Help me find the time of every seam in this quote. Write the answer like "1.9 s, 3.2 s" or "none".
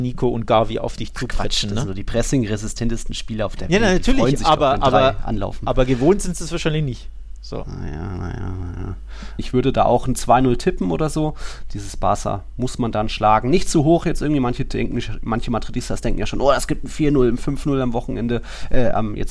9.4 s